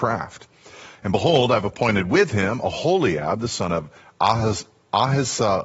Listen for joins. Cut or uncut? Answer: uncut